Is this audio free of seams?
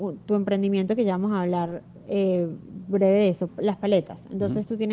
no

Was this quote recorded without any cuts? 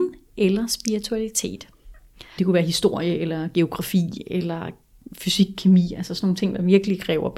no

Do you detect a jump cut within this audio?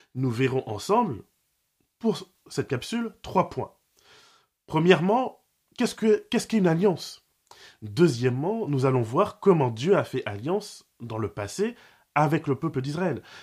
no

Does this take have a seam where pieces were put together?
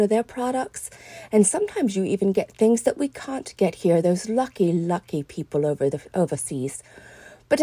no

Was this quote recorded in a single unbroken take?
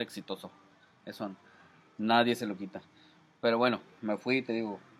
yes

